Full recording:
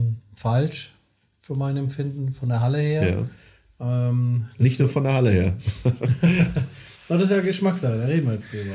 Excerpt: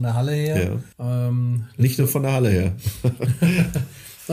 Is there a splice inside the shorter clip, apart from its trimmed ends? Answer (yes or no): yes